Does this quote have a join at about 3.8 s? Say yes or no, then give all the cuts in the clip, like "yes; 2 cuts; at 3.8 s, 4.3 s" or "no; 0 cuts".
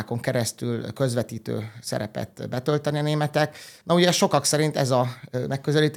yes; 1 cut; at 3.8 s